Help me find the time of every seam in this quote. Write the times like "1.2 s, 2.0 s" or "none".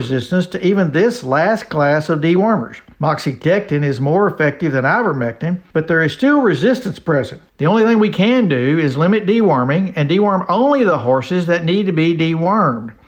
7.5 s